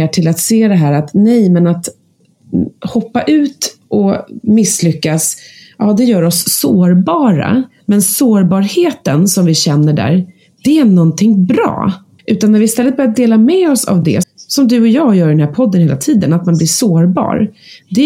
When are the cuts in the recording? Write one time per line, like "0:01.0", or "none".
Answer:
0:12.2
0:14.2